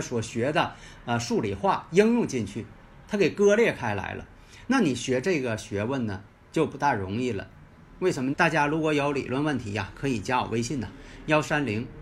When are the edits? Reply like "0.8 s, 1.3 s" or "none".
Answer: 8.3 s